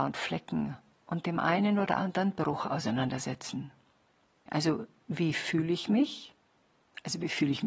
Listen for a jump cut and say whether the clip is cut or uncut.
cut